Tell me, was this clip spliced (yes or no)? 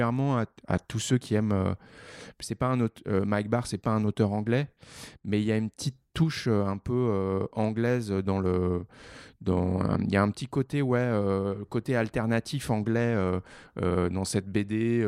no